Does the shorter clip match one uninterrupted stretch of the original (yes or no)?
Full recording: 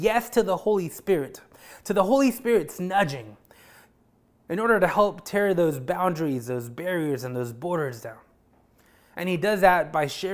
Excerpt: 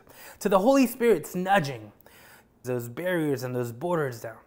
no